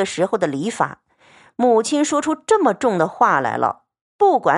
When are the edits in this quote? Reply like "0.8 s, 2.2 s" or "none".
none